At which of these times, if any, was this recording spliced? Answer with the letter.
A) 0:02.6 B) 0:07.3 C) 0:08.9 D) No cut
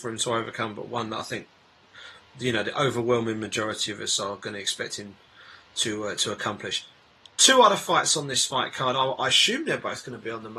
D